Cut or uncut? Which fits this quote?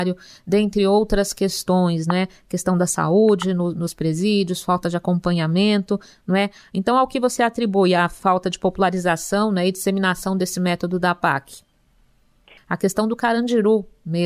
cut